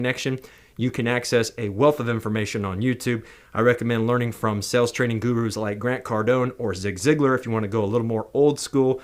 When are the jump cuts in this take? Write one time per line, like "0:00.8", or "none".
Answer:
none